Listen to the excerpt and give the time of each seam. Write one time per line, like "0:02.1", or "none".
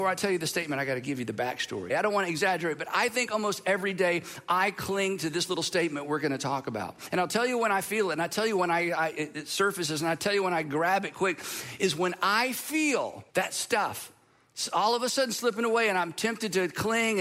0:01.9
0:13.3